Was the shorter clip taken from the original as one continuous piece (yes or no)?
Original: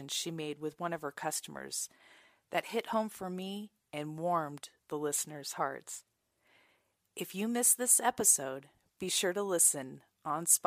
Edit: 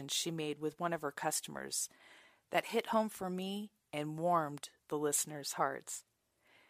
yes